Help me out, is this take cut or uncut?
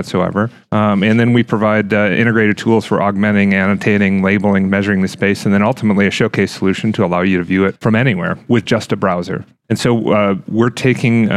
uncut